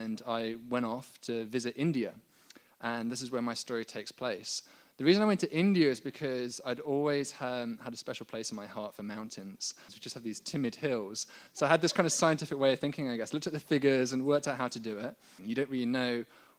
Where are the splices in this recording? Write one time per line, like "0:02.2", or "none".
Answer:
0:09.9
0:11.5
0:15.4